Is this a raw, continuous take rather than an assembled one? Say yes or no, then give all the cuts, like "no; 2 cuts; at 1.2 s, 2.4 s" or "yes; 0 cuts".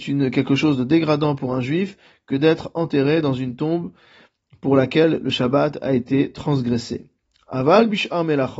yes; 0 cuts